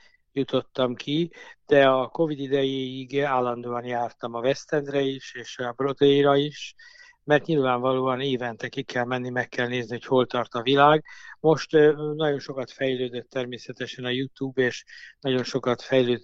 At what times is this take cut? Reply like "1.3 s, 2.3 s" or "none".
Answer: none